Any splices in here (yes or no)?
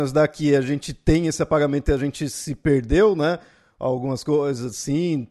no